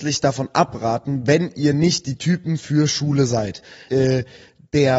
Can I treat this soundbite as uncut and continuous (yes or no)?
no